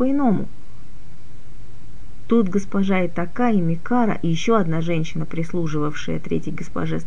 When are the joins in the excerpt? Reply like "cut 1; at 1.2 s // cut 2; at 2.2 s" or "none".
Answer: none